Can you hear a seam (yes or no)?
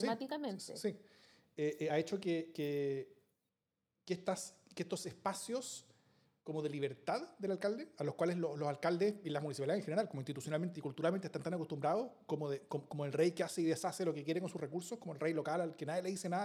no